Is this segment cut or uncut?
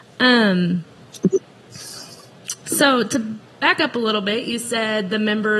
uncut